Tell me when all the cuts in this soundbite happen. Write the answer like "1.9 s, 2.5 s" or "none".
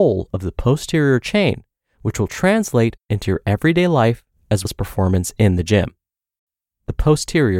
4.7 s